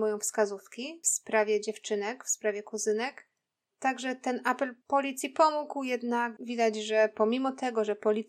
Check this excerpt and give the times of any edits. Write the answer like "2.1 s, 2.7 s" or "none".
6.4 s